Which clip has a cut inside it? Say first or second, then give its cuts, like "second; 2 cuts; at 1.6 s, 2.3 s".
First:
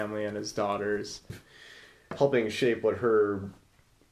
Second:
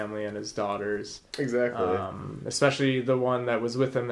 first; 1 cut; at 1.3 s